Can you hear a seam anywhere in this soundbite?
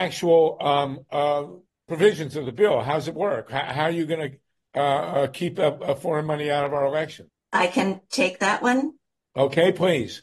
no; 0 cuts

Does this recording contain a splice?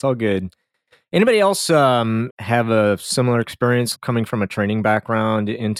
yes; 2 cuts; at 2.3 s, 3.9 s

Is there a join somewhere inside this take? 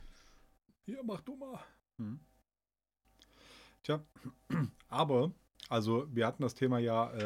yes; 1 cut; at 1.8 s

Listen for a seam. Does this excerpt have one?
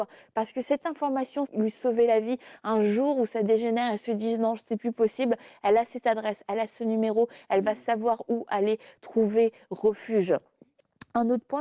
yes; 1 cut; at 1.5 s

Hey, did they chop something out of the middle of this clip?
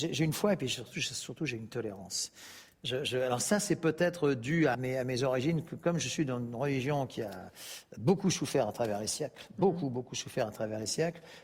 yes; 1 cut; at 4.7 s

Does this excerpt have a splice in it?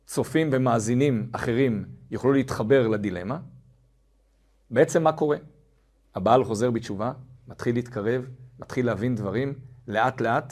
no; 0 cuts

